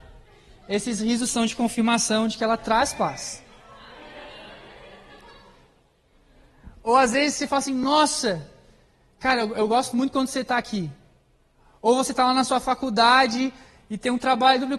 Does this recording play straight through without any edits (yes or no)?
yes